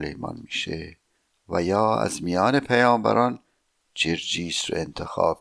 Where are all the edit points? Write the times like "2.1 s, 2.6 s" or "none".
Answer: none